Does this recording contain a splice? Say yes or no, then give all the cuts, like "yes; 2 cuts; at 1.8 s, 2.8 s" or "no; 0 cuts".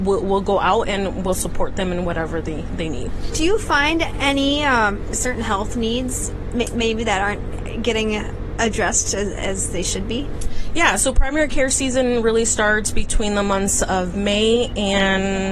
no; 0 cuts